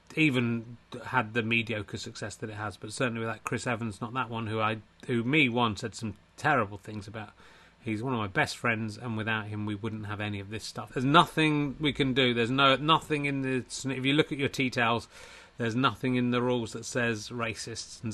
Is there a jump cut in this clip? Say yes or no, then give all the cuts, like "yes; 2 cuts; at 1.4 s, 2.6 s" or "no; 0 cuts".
yes; 1 cut; at 10.9 s